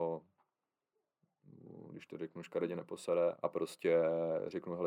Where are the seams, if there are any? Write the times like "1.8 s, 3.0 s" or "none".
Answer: 3.3 s